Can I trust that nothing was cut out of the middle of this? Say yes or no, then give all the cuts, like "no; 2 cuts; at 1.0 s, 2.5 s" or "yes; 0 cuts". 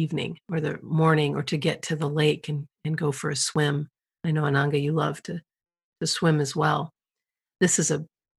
yes; 0 cuts